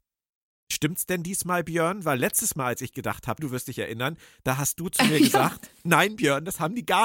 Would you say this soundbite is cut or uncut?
cut